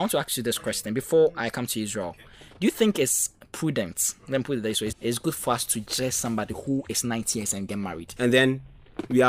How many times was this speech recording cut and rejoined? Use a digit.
2